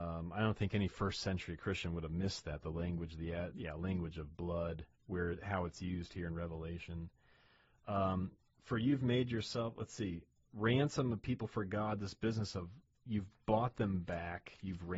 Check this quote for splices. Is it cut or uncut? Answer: cut